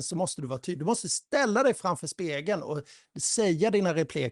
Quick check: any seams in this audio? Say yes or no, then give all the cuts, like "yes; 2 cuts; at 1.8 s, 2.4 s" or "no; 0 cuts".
no; 0 cuts